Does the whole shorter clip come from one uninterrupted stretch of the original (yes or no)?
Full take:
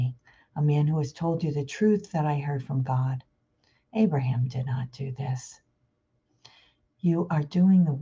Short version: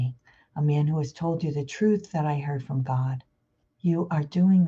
no